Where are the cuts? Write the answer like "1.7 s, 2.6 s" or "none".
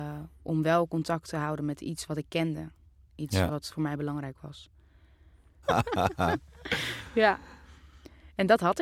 5.6 s